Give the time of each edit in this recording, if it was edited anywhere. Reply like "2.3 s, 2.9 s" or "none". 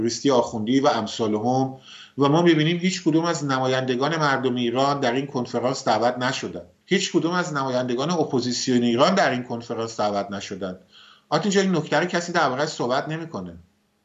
6.8 s